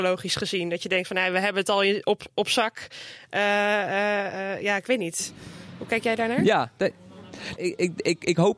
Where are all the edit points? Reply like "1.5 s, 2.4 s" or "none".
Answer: 7.6 s